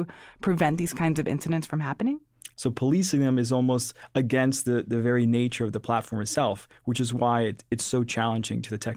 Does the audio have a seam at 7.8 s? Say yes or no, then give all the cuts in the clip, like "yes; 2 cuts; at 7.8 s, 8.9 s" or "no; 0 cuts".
no; 1 cut; at 2.5 s